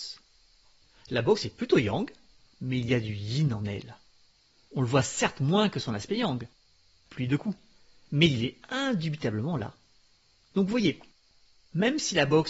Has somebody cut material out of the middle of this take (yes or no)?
no